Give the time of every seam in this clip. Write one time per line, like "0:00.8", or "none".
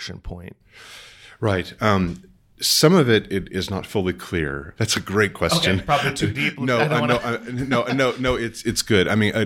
0:04.8